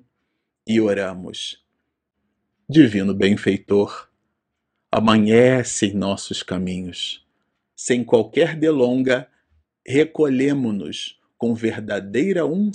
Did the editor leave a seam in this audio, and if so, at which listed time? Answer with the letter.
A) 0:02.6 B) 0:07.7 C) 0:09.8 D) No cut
B